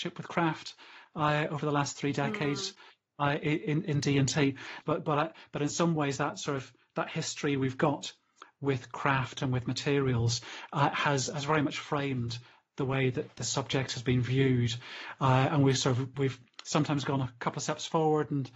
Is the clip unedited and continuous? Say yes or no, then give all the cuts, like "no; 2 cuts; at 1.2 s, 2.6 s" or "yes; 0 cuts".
no; 1 cut; at 4.8 s